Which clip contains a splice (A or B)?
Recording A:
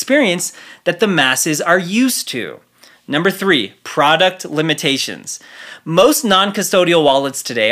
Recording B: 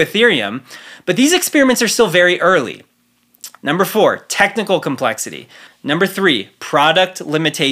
B